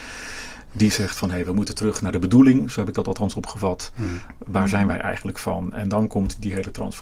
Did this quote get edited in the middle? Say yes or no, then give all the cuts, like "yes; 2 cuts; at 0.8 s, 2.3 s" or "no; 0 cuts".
no; 0 cuts